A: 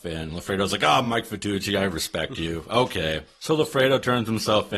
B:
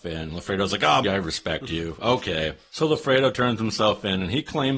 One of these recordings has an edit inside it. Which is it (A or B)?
B